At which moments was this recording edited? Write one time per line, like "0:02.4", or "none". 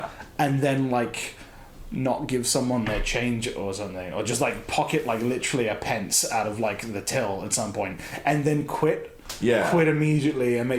none